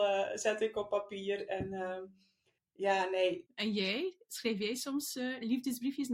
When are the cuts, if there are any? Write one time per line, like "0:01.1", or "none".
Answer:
0:03.4